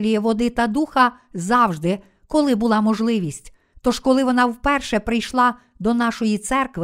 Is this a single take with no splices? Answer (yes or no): no